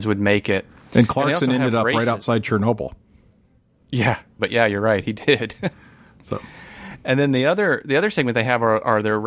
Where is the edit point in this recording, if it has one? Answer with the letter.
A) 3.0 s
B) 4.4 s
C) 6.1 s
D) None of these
B